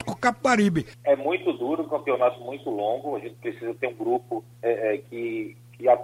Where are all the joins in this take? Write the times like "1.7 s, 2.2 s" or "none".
0.9 s, 4.5 s